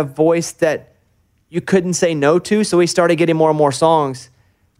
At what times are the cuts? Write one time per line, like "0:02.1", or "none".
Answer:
none